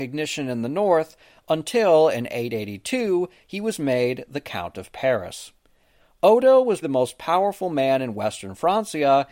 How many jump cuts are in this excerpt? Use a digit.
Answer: 1